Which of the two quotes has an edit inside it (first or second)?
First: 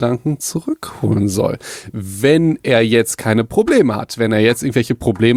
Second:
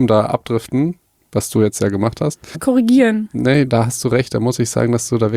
second